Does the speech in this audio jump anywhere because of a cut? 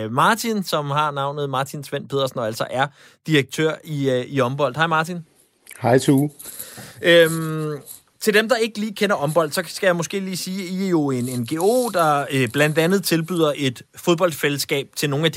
no; 0 cuts

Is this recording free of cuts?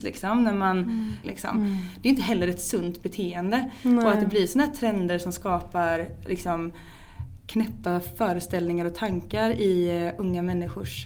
no; 1 cut; at 1.2 s

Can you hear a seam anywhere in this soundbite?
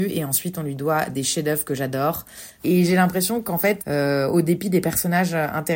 yes; 2 cuts; at 2.6 s, 3.8 s

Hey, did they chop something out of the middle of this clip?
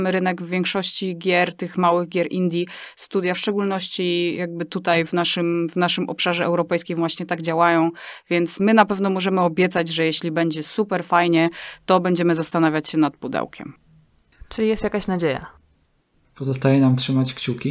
no; 0 cuts

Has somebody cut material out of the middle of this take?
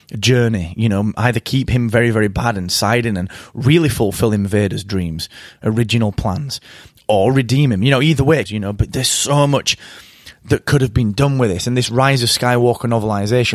yes; 1 cut; at 8.5 s

